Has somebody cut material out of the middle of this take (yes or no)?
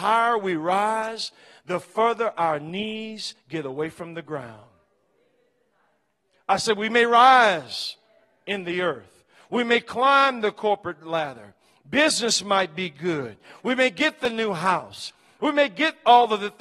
no